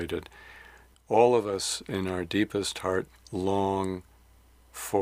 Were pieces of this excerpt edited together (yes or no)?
yes